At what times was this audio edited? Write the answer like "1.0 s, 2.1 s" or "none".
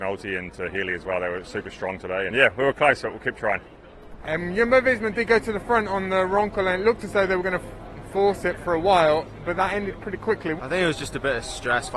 2.3 s, 4.2 s, 10.6 s